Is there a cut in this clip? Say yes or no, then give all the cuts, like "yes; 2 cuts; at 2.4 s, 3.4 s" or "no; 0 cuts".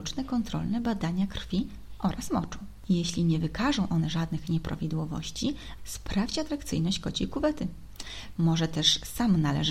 yes; 2 cuts; at 5.8 s, 8.4 s